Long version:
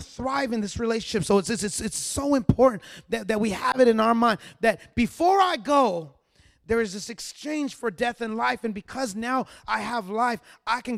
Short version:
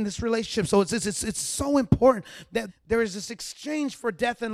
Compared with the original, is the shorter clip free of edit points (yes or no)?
no